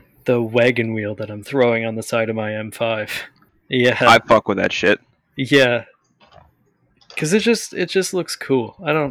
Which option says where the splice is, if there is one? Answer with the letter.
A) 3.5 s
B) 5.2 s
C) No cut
A